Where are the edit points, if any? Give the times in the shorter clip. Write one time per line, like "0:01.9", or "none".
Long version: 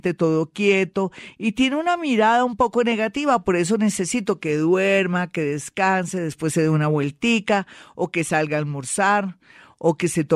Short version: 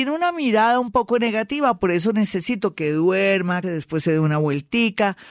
0:03.6